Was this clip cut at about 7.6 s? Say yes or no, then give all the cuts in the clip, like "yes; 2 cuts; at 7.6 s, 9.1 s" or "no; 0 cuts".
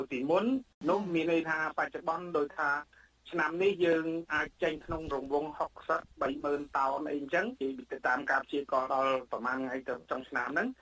yes; 1 cut; at 7.6 s